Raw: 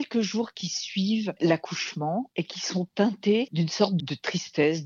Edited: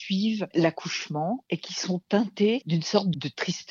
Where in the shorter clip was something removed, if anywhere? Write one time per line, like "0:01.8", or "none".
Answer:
none